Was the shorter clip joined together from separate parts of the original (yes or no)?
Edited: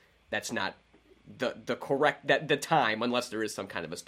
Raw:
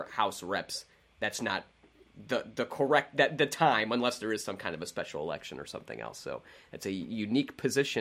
no